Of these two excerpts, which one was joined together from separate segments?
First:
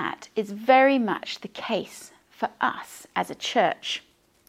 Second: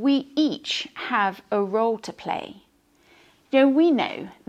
second; 1 cut; at 3.4 s

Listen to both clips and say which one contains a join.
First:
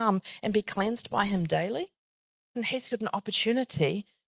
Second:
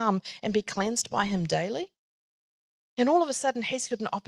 first; 1 cut; at 2.6 s

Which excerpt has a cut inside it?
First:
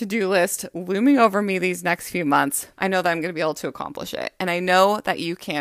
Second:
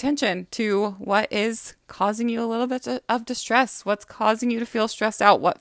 first; 1 cut; at 2.8 s

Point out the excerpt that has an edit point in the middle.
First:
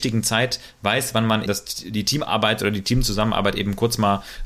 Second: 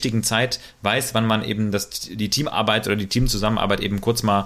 first; 1 cut; at 1.5 s

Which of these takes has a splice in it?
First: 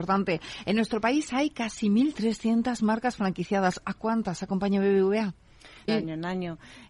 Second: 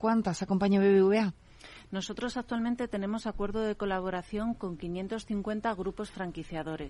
first; 1 cut; at 5.9 s

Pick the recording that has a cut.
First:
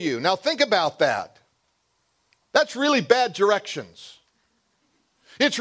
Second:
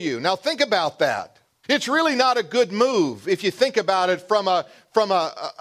second; 1 cut; at 1.6 s

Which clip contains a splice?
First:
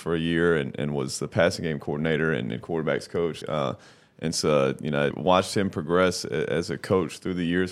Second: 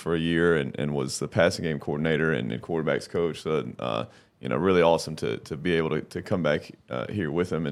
first; 2 cuts; at 3.4 s, 5.1 s

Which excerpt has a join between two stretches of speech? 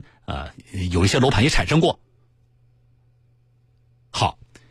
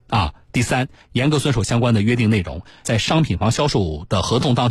second; 1 cut; at 2.8 s

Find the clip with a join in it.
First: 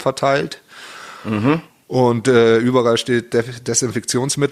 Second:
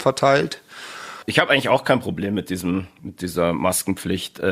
second; 1 cut; at 1.2 s

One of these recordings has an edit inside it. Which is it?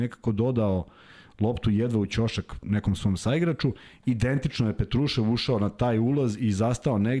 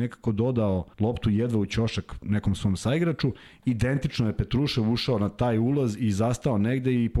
second; 1 cut; at 0.9 s

